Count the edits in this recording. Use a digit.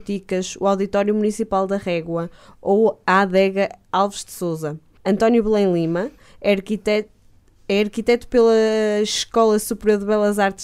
1